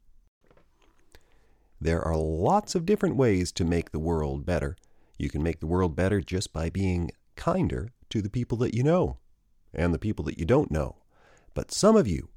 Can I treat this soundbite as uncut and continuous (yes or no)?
yes